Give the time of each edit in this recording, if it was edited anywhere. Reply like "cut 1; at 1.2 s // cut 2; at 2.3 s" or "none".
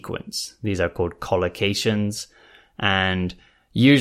none